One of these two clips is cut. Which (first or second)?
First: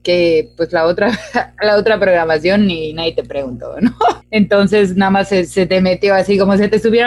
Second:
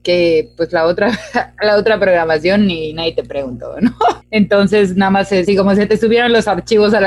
second